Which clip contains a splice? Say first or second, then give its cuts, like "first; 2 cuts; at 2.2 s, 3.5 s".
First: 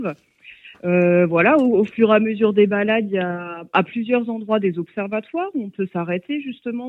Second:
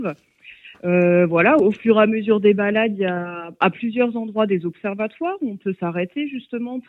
second; 1 cut; at 1.6 s